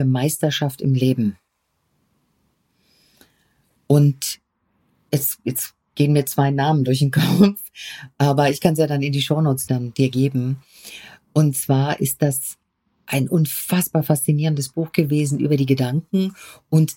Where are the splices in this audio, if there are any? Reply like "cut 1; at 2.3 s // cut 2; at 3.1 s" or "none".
cut 1; at 9.7 s